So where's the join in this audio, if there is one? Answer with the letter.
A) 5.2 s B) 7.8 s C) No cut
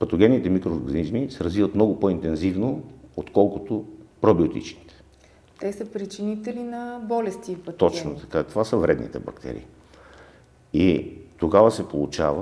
C